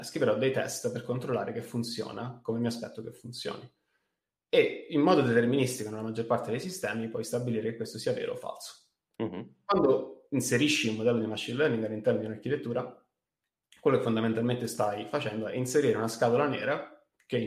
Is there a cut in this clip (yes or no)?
yes